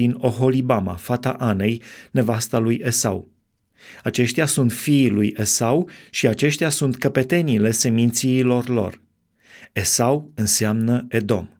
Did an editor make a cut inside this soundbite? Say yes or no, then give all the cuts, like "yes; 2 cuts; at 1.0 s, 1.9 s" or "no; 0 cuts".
no; 0 cuts